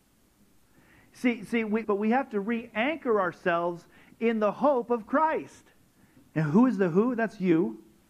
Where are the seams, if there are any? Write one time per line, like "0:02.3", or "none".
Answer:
0:01.8
0:06.2